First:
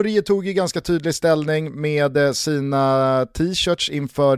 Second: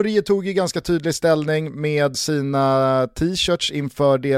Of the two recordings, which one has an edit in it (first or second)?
second